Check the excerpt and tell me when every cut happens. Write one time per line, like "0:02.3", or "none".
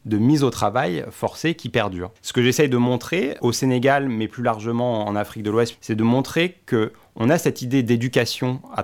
0:02.2
0:05.7